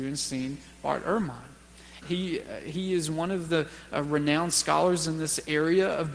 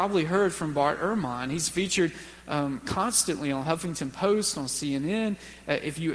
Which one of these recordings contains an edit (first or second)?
first